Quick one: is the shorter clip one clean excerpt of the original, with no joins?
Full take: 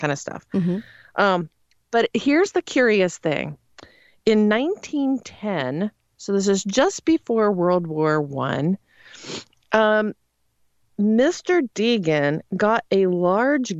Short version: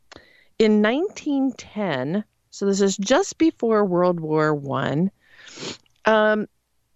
yes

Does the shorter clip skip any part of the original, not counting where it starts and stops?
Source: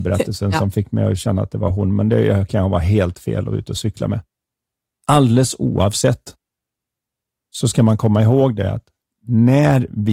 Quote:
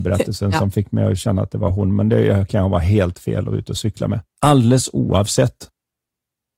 yes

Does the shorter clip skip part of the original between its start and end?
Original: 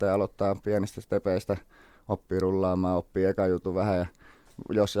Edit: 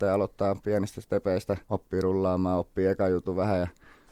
yes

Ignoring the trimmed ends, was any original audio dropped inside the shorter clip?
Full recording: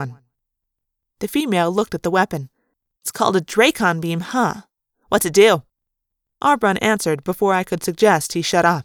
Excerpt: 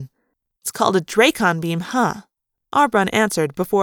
yes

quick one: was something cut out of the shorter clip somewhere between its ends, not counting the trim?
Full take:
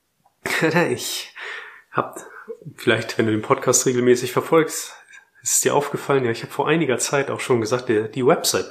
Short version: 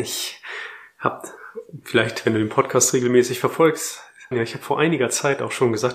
yes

